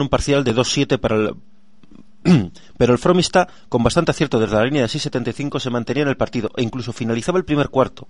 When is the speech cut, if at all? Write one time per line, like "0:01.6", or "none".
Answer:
none